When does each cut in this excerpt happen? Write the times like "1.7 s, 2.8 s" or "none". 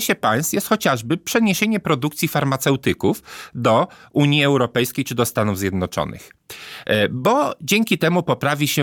none